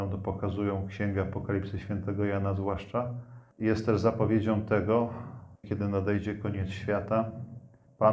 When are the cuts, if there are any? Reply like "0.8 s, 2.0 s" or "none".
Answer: 5.6 s

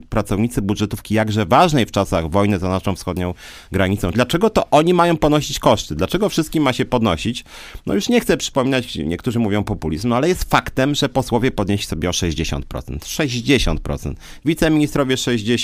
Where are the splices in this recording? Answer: 4.1 s

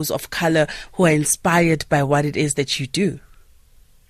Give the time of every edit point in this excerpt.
none

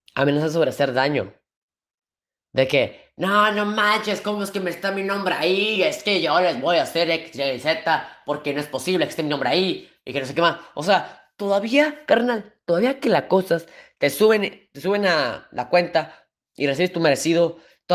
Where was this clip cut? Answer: none

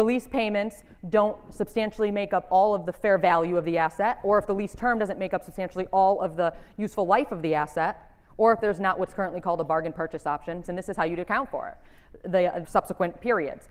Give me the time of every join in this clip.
10.6 s, 12.6 s

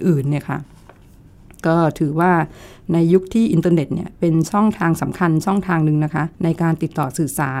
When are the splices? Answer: 6.3 s

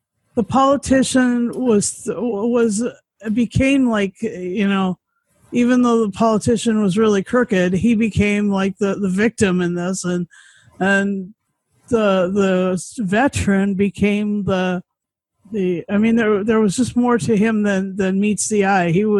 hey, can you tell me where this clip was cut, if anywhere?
none

